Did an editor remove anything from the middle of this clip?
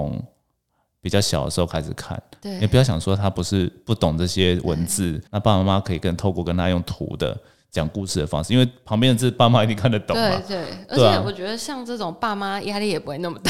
yes; 1 cut; at 5.3 s

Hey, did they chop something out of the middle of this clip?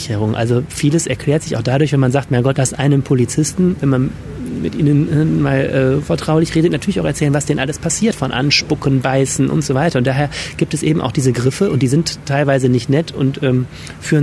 yes; 1 cut; at 2.5 s

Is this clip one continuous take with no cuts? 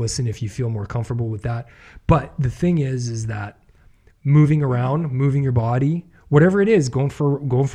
yes; 0 cuts

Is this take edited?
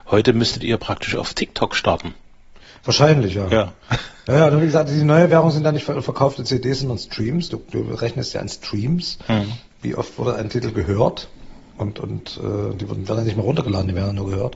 no; 0 cuts

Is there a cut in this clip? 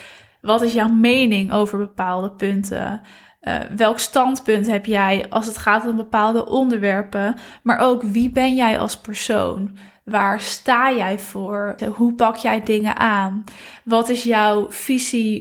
yes; 1 cut; at 11.8 s

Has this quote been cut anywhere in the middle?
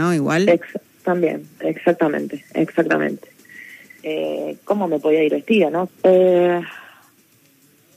yes; 2 cuts; at 4.0 s, 5.9 s

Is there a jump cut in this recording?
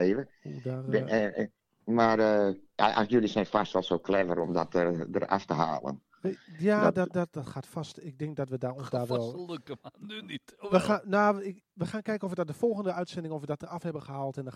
yes; 2 cuts; at 7.3 s, 11.7 s

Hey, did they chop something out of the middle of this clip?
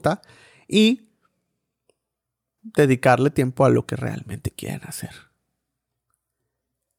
yes; 1 cut; at 2.6 s

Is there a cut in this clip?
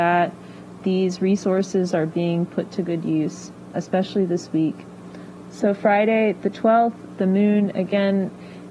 yes; 1 cut; at 3.7 s

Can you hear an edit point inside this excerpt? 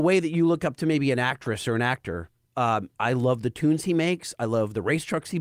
yes; 1 cut; at 3.0 s

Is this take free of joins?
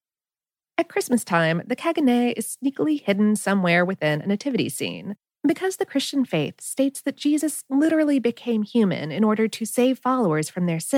no; 1 cut; at 5.3 s

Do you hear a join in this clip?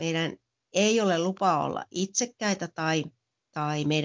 no; 0 cuts

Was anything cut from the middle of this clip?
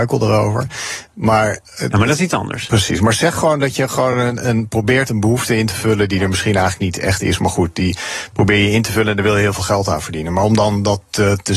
no; 0 cuts

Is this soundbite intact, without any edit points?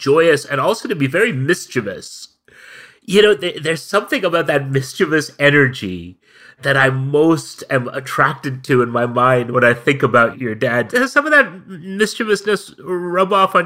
yes; 0 cuts

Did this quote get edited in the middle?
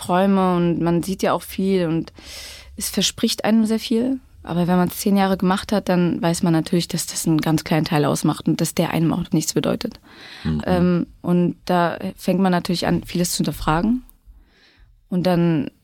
yes; 2 cuts; at 9.3 s, 10.6 s

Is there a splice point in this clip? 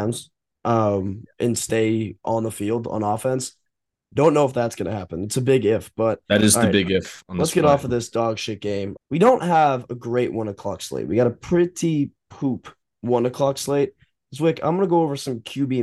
yes; 1 cut; at 9.0 s

